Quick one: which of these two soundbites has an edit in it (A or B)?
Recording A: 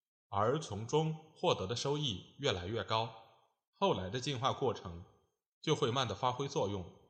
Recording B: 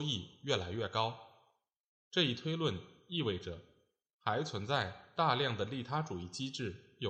A